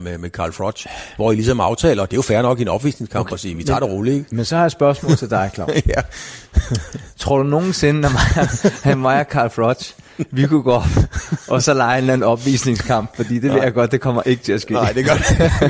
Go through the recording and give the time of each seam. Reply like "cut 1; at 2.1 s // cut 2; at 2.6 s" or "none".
none

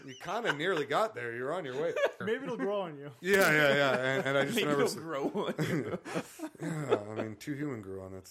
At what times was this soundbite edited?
cut 1; at 2.2 s

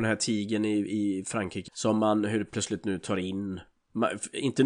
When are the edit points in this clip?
cut 1; at 1.7 s

